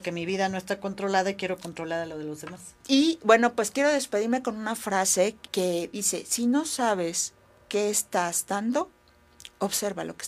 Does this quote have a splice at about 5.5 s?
yes; 1 cut; at 5.5 s

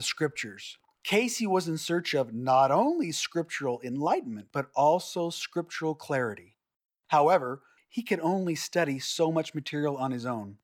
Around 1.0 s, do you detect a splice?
no; 1 cut; at 7.8 s

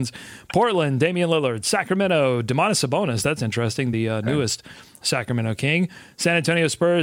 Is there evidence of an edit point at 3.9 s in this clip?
no; 0 cuts

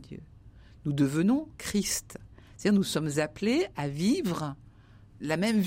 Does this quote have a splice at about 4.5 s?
no; 1 cut; at 1.6 s

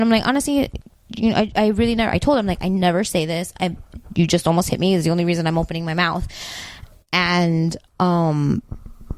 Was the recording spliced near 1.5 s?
no; 1 cut; at 7.9 s

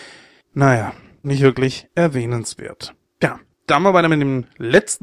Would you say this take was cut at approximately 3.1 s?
no; 1 cut; at 1.2 s

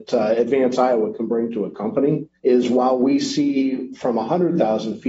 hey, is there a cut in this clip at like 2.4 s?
yes; 1 cut; at 2.4 s

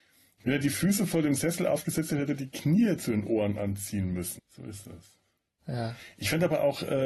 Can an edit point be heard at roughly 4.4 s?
yes; 1 cut; at 4.4 s

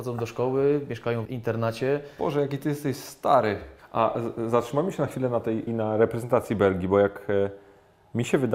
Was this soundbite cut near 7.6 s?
no; 3 cuts; at 1.3 s, 3.8 s, 5.7 s

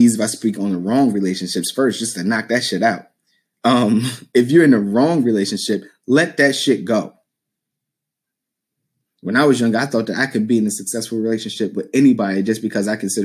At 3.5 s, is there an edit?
no; 1 cut; at 9.0 s

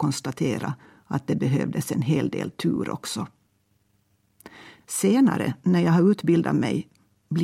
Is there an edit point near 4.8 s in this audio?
yes; 1 cut; at 4.8 s

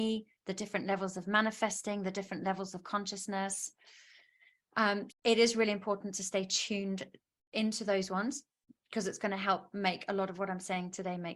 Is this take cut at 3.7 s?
no; 1 cut; at 5.1 s

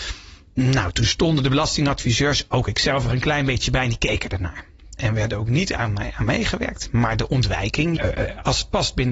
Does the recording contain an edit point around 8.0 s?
yes; 2 cuts; at 5.0 s, 8.0 s

